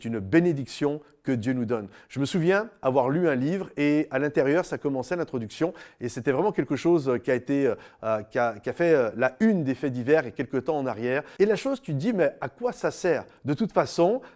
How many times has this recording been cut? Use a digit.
1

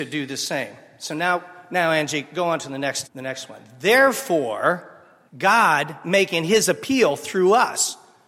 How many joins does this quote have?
2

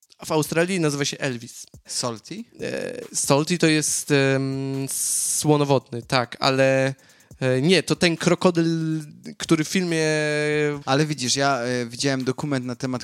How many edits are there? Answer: 2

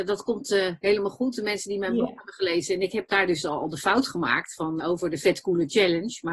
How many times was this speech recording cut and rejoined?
1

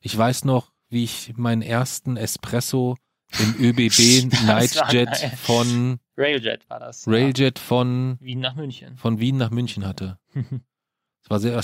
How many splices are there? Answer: 0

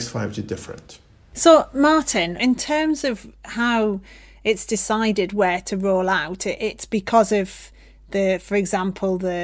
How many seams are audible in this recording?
0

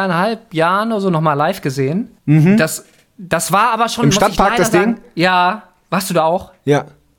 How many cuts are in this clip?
1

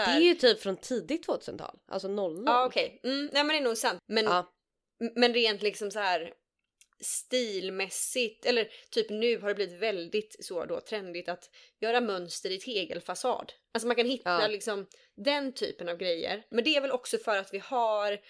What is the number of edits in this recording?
2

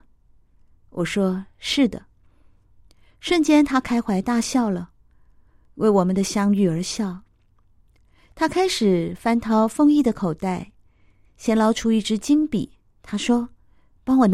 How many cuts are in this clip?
0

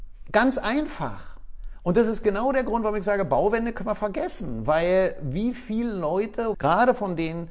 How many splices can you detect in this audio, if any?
1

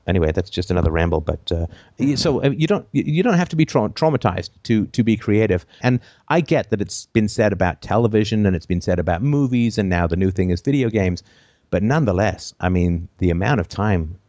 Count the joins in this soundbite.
1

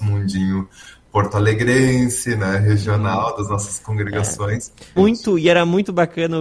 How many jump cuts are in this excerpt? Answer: 1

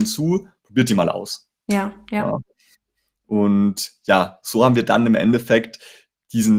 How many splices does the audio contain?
0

